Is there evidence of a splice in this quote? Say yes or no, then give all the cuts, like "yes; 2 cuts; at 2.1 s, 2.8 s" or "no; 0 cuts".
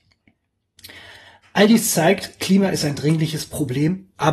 no; 0 cuts